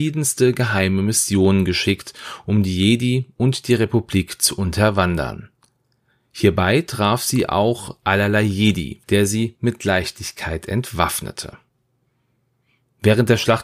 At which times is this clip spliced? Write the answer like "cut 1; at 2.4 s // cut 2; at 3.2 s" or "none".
cut 1; at 9.0 s